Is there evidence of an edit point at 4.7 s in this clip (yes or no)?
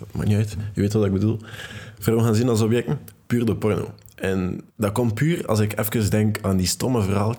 yes